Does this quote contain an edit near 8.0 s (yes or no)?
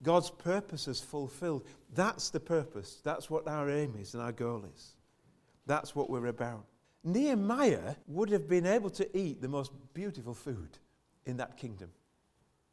yes